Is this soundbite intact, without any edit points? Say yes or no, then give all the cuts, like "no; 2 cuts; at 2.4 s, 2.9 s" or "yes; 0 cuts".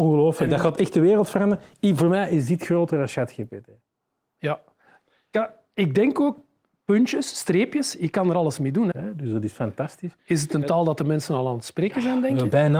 no; 1 cut; at 8.9 s